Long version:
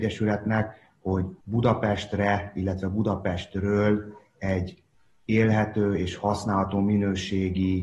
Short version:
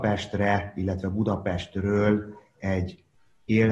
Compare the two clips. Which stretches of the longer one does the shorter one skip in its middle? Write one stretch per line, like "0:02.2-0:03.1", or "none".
none